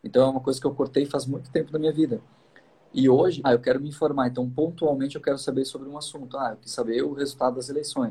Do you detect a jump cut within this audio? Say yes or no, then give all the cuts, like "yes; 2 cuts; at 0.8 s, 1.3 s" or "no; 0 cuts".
yes; 1 cut; at 3.4 s